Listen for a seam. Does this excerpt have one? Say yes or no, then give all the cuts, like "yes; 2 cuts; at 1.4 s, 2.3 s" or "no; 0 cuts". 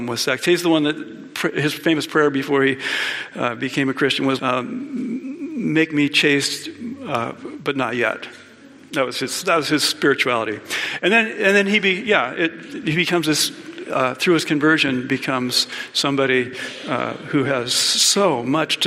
yes; 1 cut; at 4.4 s